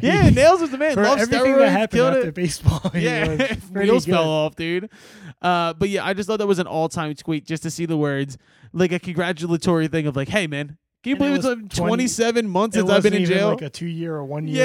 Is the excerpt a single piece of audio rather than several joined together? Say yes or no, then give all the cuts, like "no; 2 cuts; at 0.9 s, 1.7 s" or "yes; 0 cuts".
yes; 0 cuts